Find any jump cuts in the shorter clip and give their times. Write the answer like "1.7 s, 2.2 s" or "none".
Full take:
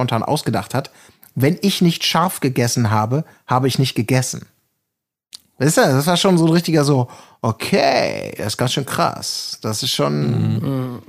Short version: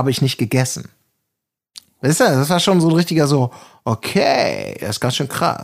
none